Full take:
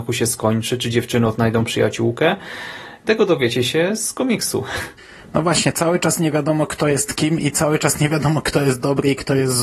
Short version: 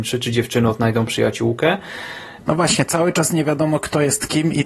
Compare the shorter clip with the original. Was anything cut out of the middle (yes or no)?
yes